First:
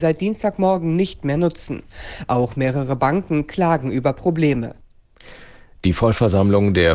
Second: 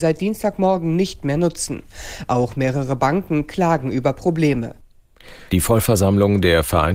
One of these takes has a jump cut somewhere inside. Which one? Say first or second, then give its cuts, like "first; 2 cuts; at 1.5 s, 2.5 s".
second; 1 cut; at 5.5 s